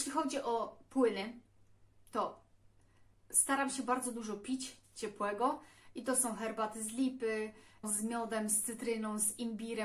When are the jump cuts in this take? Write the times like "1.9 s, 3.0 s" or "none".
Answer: 7.8 s